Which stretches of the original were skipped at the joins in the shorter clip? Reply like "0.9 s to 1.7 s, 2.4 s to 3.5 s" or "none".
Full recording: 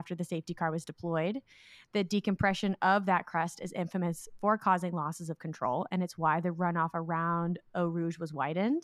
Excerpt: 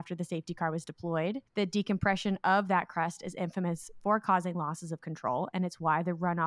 1.5 s to 1.8 s